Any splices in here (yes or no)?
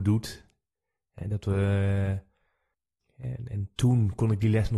no